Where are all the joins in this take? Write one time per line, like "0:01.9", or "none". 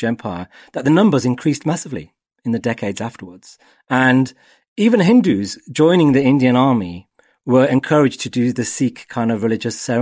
none